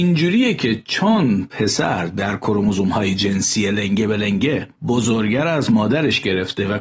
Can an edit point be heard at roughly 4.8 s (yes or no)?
yes